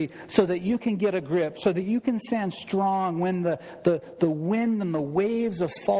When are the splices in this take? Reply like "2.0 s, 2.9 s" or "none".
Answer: none